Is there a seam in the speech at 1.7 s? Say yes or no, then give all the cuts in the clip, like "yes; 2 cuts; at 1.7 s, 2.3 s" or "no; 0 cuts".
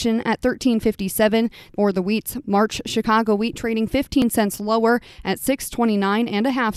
yes; 1 cut; at 1.7 s